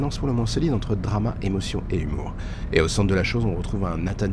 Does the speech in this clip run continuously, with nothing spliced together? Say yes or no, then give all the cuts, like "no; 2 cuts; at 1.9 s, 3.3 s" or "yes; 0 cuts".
yes; 0 cuts